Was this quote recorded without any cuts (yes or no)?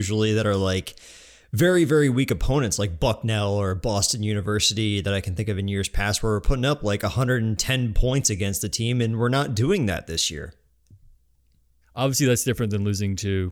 no